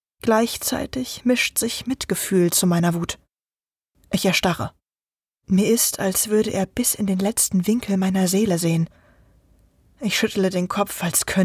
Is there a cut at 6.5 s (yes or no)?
no